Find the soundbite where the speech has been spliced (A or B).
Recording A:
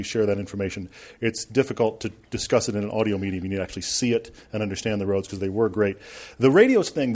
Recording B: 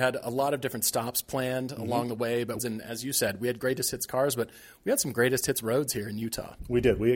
B